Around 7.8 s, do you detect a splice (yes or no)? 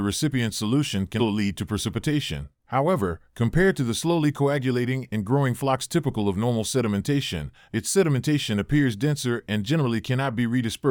no